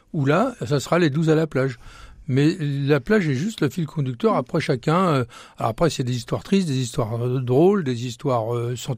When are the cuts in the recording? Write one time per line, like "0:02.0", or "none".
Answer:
none

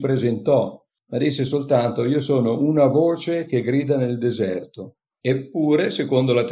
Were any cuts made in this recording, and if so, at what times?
0:05.2

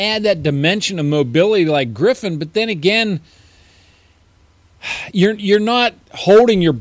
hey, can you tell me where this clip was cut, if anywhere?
none

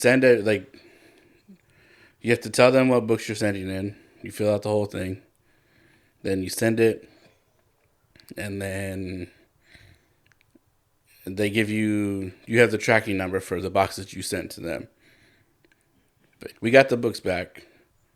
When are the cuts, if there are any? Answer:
0:16.5

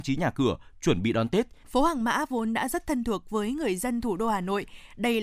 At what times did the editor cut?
0:01.6

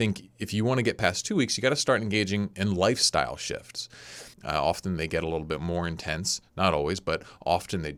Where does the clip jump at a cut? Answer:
0:04.3

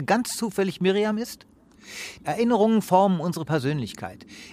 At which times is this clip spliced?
0:02.2

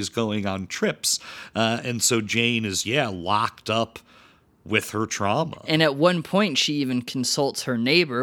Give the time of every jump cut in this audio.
0:02.8

